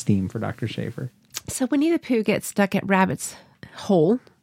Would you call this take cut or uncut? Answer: uncut